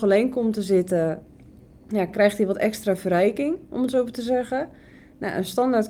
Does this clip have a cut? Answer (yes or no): no